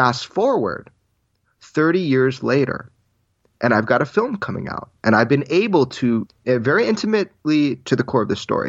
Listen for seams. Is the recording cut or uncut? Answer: cut